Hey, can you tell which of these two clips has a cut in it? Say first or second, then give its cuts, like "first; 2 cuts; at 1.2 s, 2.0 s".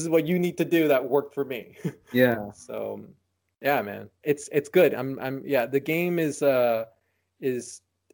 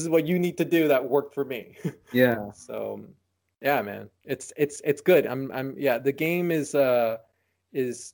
first; 1 cut; at 4.2 s